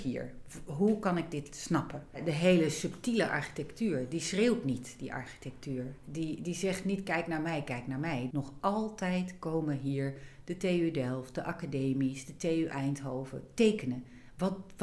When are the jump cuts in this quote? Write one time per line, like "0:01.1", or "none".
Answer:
0:08.3